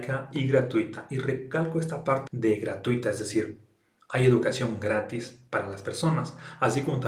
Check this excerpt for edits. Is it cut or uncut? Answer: cut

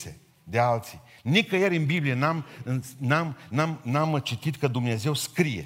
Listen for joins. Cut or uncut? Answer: uncut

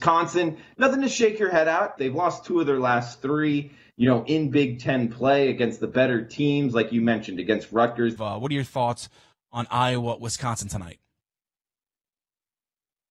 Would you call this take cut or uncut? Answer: cut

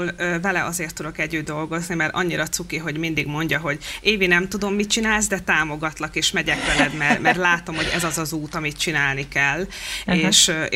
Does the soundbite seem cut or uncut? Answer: uncut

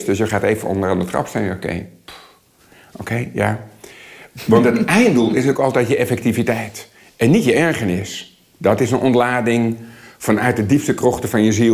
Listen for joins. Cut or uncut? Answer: uncut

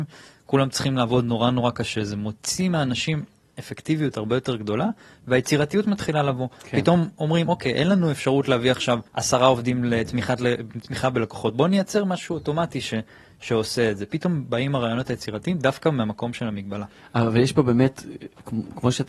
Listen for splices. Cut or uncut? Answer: cut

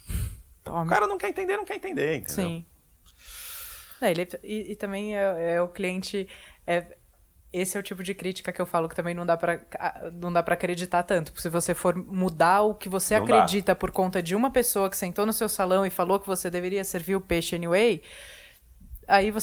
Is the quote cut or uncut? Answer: uncut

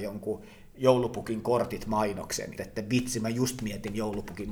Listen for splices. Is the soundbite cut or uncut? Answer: cut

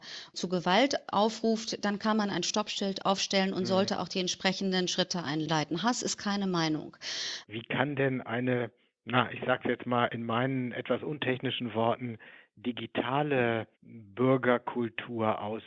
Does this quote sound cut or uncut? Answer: cut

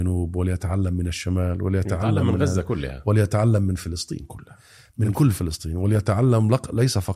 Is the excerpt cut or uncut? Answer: uncut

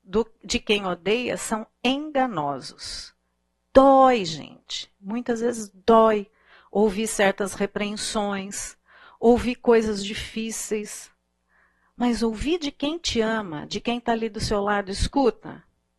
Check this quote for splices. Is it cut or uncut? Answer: uncut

